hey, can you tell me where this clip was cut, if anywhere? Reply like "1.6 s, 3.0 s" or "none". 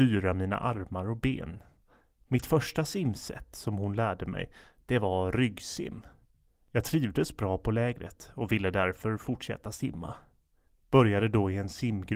none